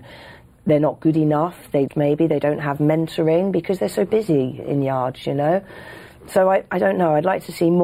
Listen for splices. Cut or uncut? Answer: cut